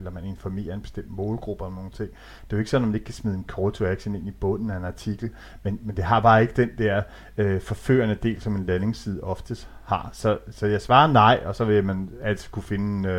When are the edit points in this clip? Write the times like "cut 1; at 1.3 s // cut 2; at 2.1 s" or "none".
none